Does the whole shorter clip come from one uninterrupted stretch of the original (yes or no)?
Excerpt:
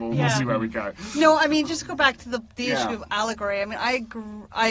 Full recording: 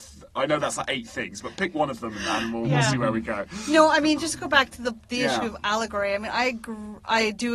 yes